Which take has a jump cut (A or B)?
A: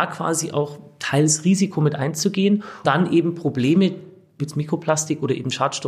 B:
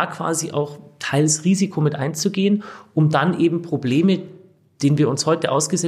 A